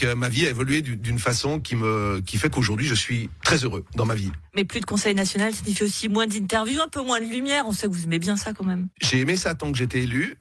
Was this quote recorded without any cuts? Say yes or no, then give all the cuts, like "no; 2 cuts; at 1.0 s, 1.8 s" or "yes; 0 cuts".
no; 1 cut; at 8.9 s